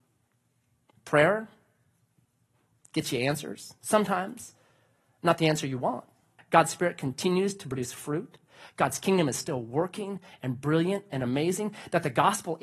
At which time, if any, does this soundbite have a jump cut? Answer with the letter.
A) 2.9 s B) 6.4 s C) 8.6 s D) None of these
B